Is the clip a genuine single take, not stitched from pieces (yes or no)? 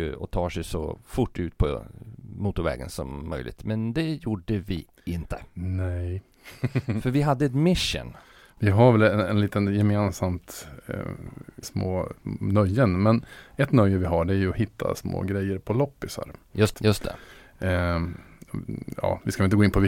no